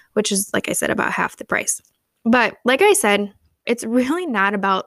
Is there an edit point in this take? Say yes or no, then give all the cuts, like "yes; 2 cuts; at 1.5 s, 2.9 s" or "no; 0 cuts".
yes; 1 cut; at 3.7 s